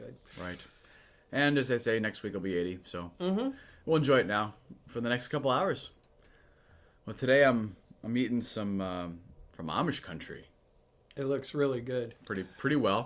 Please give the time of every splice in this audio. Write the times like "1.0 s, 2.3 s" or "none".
9.5 s, 12.1 s

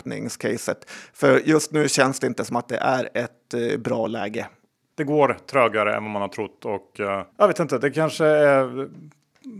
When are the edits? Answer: 4.9 s, 7.3 s

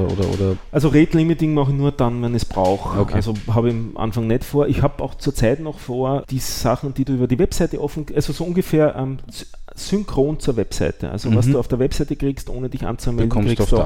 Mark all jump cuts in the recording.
6.2 s

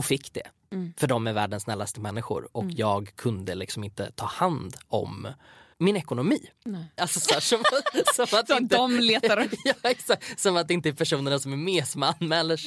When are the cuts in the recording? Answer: 5.7 s, 7.0 s

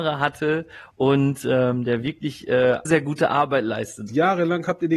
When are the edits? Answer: 2.9 s, 4.1 s

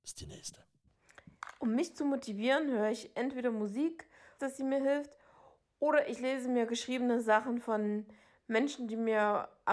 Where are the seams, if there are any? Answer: 4.4 s

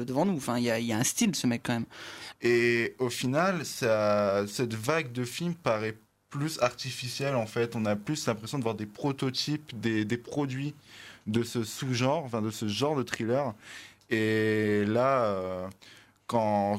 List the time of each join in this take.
2.3 s

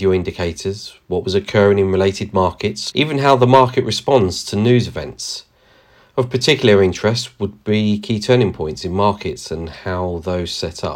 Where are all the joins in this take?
2.9 s

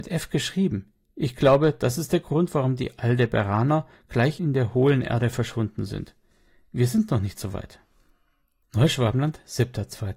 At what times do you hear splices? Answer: none

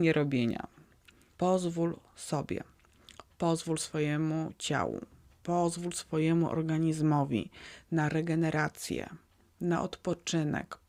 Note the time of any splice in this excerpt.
1.3 s

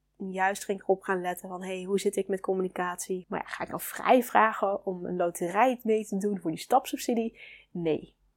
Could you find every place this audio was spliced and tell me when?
3.2 s

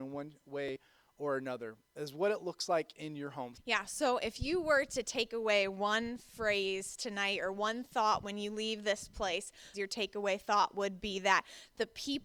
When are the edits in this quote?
3.5 s, 9.7 s

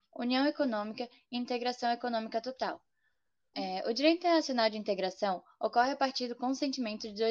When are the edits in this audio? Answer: 3.5 s

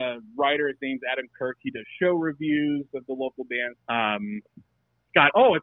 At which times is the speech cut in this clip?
3.8 s

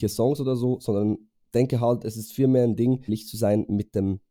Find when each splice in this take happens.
3.1 s

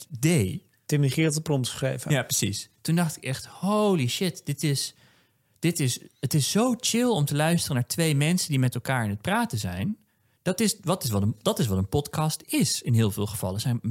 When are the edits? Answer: none

